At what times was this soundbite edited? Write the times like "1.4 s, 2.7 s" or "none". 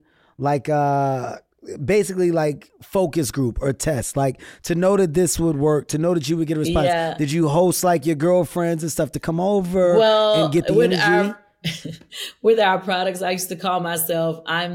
none

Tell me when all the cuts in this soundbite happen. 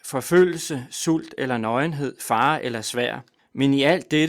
3.4 s

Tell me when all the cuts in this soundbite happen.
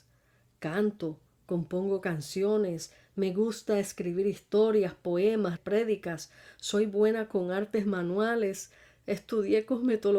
5.6 s

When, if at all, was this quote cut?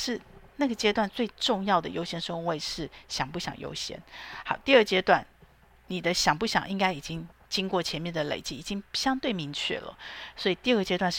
none

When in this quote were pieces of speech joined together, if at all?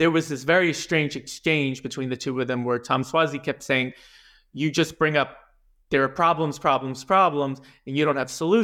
none

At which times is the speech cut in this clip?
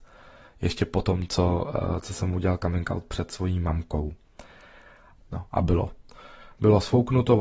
5.2 s

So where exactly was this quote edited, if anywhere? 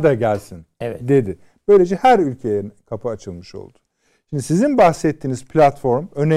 none

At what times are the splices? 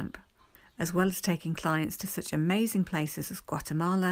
none

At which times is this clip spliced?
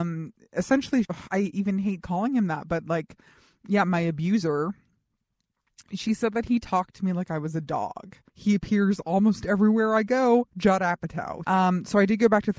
1.0 s, 8.3 s, 11.4 s

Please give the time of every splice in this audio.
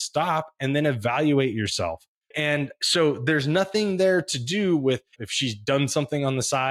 2.3 s, 5.2 s

